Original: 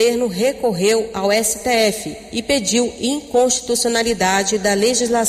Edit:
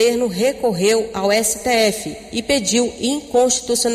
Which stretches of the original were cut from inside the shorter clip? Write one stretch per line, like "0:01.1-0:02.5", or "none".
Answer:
none